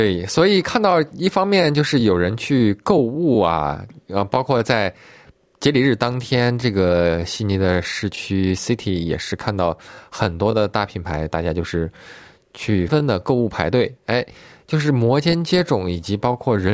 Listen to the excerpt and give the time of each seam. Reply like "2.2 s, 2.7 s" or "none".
12.9 s